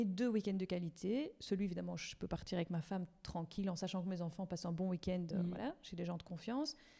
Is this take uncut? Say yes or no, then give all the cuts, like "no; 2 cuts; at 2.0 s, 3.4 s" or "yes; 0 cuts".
yes; 0 cuts